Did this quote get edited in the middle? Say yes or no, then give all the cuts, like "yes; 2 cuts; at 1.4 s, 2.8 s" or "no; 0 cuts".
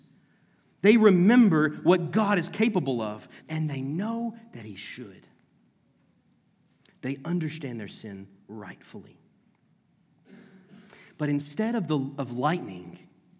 yes; 1 cut; at 3.4 s